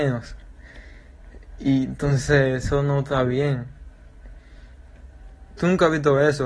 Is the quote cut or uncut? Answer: cut